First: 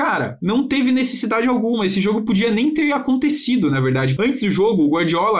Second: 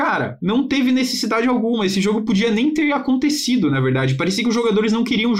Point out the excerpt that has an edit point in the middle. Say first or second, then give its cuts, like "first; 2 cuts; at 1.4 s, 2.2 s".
first; 1 cut; at 4.2 s